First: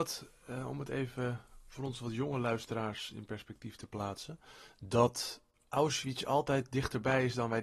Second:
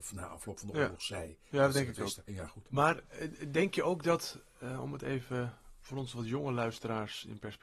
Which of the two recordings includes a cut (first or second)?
second